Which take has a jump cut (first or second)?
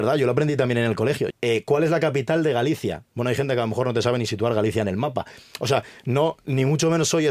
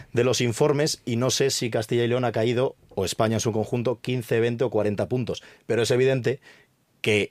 first